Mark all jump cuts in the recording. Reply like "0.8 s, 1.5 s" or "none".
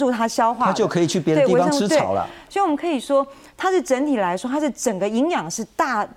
2.5 s